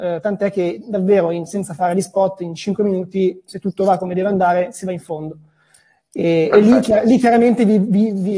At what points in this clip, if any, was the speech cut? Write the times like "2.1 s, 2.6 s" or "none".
none